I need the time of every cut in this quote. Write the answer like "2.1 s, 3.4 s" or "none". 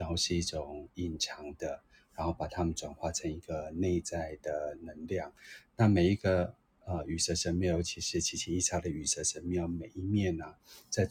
none